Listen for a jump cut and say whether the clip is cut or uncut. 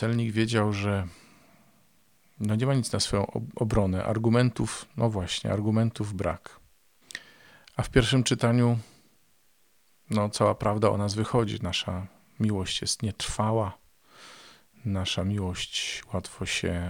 uncut